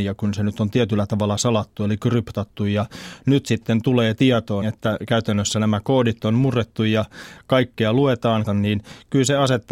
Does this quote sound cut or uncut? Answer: cut